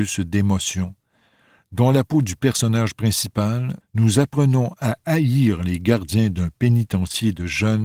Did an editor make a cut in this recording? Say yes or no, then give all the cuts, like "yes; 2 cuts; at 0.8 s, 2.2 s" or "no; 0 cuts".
yes; 1 cut; at 3.8 s